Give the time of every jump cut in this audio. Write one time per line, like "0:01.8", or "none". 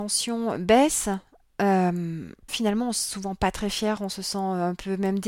0:02.5